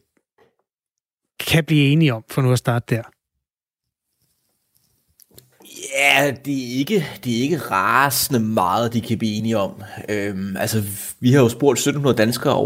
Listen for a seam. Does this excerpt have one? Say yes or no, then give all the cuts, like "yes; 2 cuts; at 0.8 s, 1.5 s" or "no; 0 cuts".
no; 0 cuts